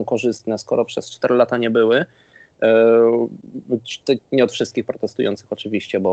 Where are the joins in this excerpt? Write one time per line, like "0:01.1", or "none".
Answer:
0:04.2